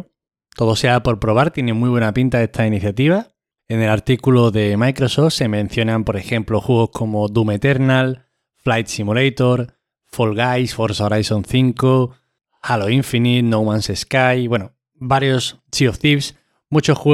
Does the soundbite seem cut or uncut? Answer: cut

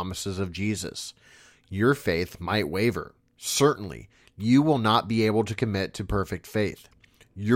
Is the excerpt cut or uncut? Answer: cut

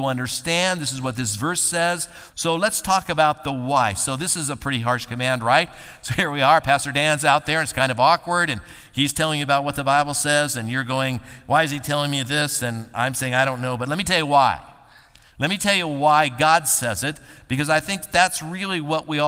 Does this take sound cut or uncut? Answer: cut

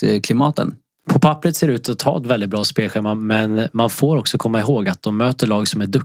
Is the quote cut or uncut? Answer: cut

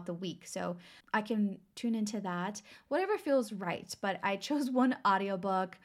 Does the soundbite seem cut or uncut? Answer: cut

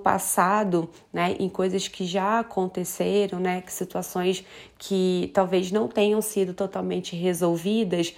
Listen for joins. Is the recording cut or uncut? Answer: uncut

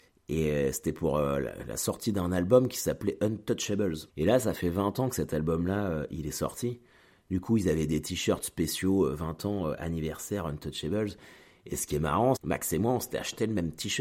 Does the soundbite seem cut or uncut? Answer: cut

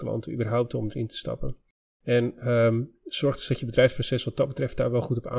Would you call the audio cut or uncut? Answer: uncut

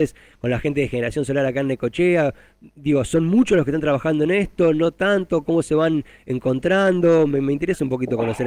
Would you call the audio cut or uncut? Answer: uncut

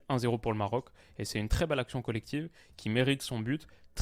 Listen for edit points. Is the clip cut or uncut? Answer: uncut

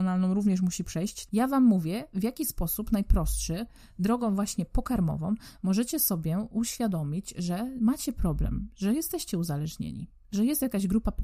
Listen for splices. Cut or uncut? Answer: cut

